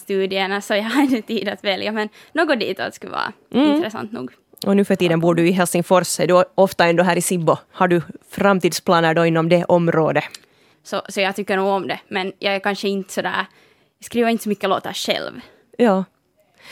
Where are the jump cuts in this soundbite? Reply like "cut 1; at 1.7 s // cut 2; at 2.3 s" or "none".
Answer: cut 1; at 7.7 s // cut 2; at 10.7 s